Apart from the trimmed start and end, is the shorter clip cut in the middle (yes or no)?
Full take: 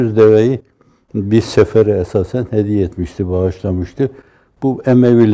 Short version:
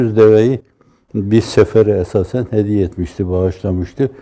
no